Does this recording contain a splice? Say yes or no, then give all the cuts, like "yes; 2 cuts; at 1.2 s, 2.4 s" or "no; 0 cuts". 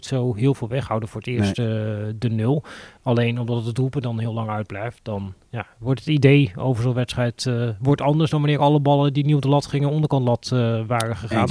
no; 0 cuts